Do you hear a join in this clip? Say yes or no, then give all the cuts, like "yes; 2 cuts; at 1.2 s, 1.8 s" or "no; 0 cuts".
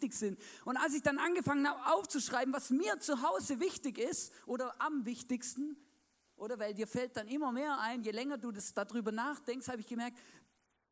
no; 0 cuts